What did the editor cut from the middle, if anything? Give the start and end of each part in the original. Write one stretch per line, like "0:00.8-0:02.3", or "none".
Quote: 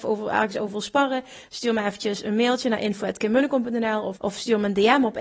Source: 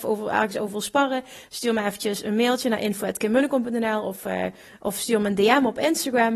0:04.2-0:04.8